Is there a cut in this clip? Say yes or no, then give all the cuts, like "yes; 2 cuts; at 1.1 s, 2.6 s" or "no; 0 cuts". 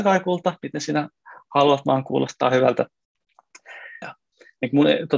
yes; 1 cut; at 4.0 s